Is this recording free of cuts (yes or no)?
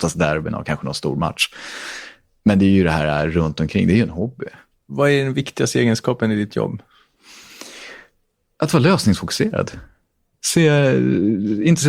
yes